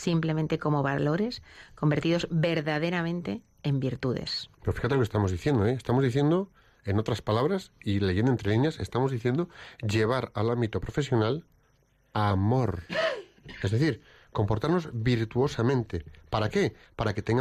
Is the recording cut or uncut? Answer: uncut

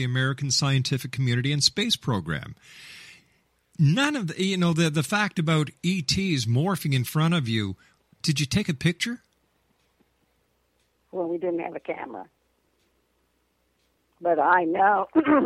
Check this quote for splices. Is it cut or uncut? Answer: uncut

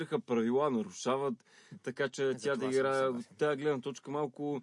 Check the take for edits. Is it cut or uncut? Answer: uncut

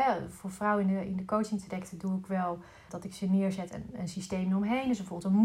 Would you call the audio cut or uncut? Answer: cut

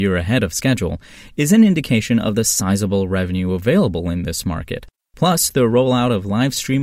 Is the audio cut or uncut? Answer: uncut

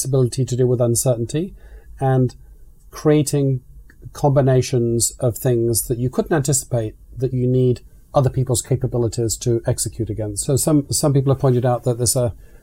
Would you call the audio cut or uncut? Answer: cut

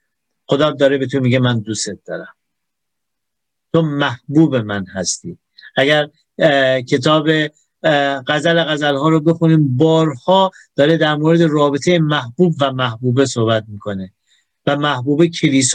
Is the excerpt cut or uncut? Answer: uncut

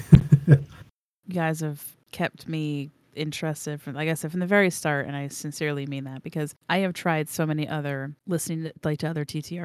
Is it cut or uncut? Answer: uncut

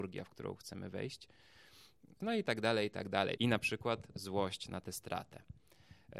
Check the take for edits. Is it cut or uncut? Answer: cut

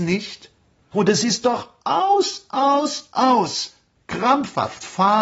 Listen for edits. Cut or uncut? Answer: cut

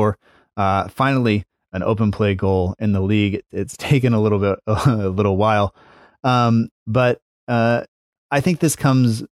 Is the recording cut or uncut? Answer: uncut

